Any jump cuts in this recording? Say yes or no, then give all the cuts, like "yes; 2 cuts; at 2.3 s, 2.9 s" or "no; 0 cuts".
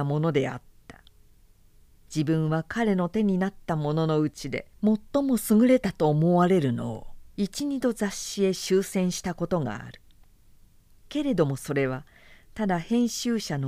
no; 0 cuts